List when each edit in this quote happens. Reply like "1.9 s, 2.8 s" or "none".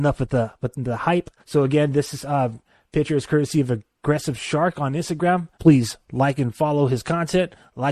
1.4 s, 5.5 s